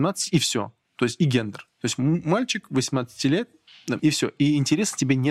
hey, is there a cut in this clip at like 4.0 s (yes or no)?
yes